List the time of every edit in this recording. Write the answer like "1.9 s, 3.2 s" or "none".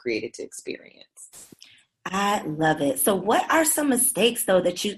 none